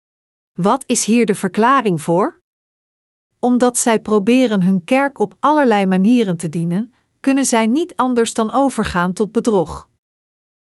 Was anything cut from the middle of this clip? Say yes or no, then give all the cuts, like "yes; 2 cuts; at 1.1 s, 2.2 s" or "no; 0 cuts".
no; 0 cuts